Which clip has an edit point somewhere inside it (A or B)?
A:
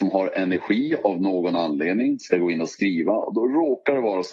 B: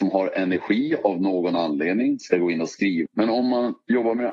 B